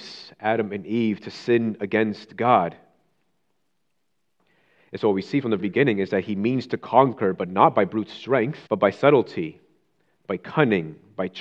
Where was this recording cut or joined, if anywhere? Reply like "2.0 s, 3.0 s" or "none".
5.6 s, 8.7 s